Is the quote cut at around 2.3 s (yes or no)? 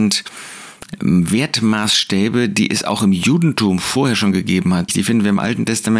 no